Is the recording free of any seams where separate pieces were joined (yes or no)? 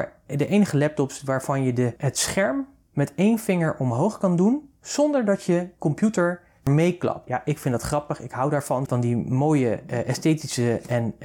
no